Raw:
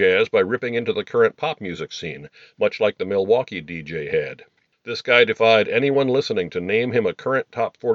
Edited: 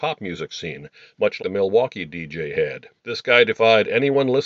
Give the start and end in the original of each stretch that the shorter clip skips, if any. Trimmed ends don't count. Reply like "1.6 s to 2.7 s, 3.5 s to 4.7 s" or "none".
2.8 s to 2.9 s, 4.5 s to 4.8 s